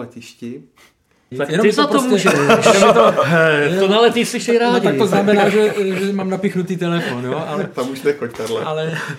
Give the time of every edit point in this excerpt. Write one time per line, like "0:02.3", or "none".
0:01.3